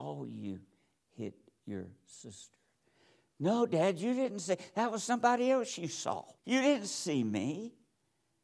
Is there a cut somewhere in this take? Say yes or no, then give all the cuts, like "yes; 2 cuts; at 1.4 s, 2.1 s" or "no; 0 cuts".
yes; 1 cut; at 6.4 s